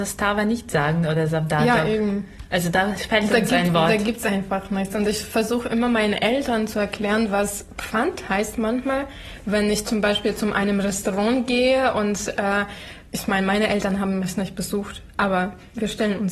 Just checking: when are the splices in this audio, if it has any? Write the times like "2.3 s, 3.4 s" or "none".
13.1 s